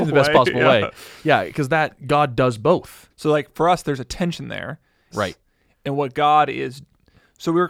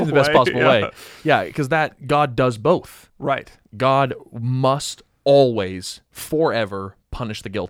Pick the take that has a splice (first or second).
first